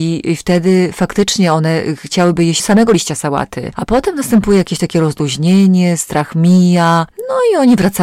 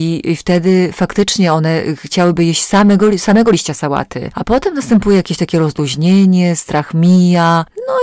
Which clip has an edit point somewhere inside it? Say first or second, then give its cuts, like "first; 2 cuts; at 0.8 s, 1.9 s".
first; 1 cut; at 2.6 s